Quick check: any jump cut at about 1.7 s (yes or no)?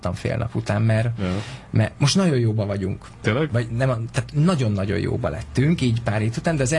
no